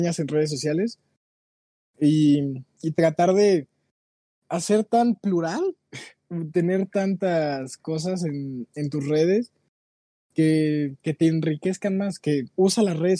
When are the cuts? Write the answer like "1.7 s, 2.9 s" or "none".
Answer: none